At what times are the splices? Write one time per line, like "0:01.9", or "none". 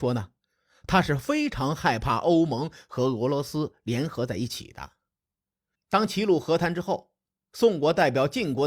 0:05.7